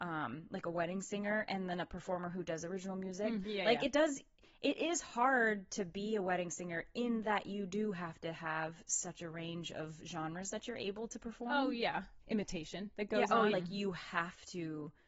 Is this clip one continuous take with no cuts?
no; 3 cuts; at 3.4 s, 12.2 s, 13.5 s

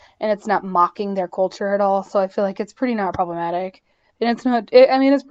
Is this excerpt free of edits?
no; 1 cut; at 4.1 s

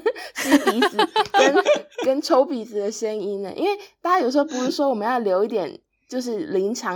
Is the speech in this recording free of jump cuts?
yes; 0 cuts

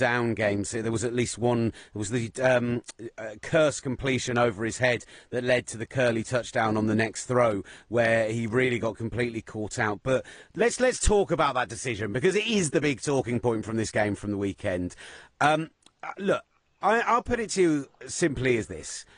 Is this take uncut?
yes; 0 cuts

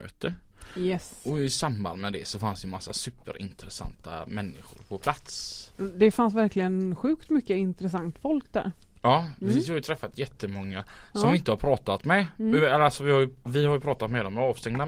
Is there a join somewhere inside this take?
no; 0 cuts

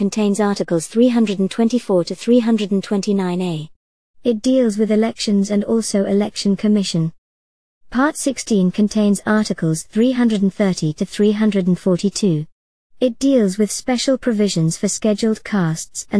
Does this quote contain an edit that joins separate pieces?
no; 0 cuts

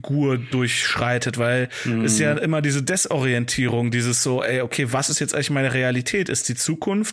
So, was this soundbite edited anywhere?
no; 0 cuts

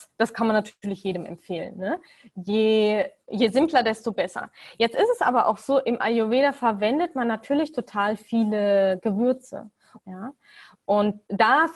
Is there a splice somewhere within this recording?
yes; 2 cuts; at 3.2 s, 10.0 s

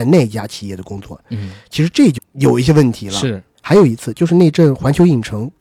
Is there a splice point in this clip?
yes; 1 cut; at 2.2 s

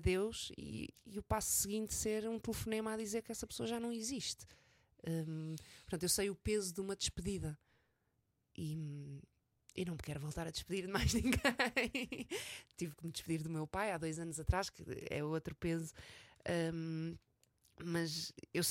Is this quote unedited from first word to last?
yes; 0 cuts

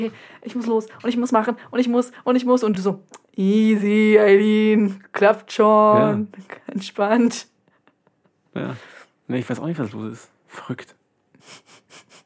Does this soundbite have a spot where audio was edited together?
no; 0 cuts

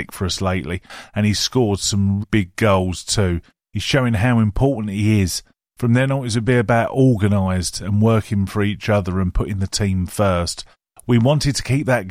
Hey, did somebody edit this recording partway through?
yes; 2 cuts; at 2.2 s, 5.7 s

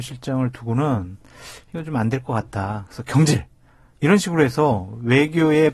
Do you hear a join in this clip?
no; 0 cuts

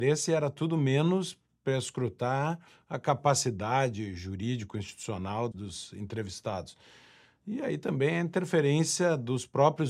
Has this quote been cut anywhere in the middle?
yes; 1 cut; at 5.5 s

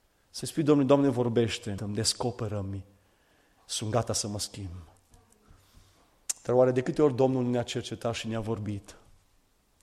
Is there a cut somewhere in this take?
yes; 1 cut; at 1.8 s

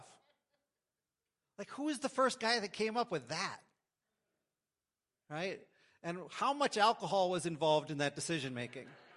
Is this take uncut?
yes; 0 cuts

